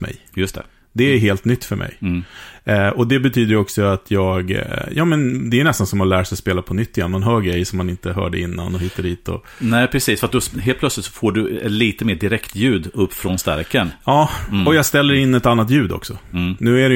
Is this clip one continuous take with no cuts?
yes; 0 cuts

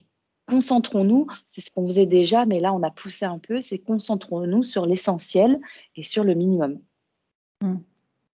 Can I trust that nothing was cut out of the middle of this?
yes; 0 cuts

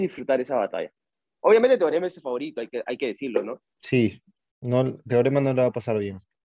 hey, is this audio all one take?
no; 2 cuts; at 1.4 s, 3.6 s

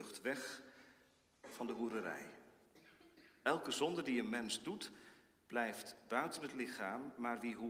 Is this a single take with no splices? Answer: yes; 0 cuts

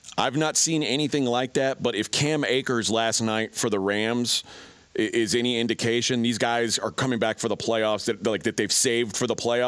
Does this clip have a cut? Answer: no; 0 cuts

